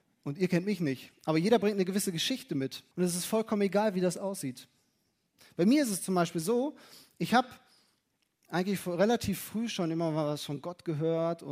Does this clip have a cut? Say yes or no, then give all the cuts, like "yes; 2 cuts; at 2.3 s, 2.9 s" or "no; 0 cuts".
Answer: yes; 1 cut; at 2.9 s